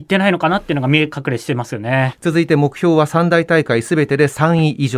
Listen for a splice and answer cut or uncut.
cut